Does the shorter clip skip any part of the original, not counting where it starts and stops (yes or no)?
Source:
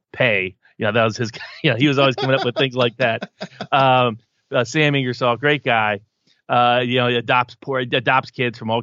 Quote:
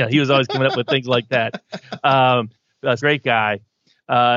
yes